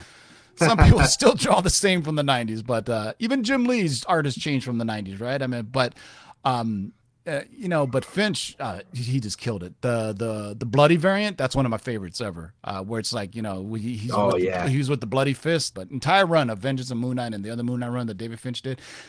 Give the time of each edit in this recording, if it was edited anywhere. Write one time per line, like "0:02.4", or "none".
0:15.7